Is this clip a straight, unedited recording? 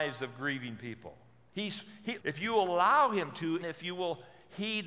no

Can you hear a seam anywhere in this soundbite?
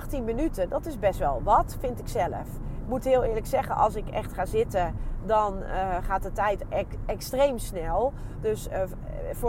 no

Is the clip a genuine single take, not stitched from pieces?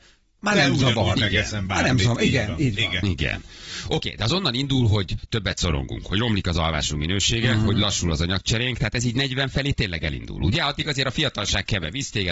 yes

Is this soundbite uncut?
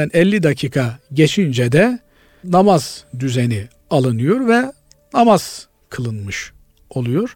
yes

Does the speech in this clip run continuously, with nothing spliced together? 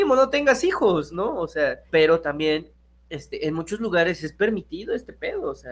no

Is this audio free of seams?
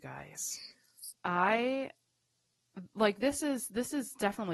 no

